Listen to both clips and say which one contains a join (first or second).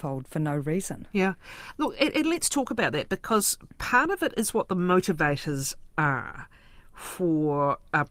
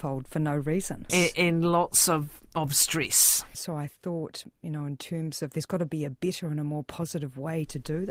second